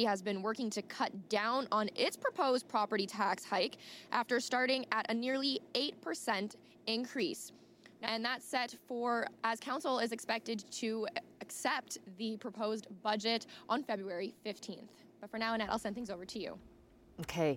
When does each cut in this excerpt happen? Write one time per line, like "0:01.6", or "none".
0:08.0